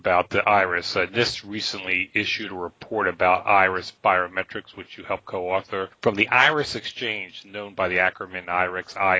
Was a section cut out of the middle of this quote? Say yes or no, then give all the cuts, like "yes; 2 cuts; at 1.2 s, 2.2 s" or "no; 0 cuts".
no; 0 cuts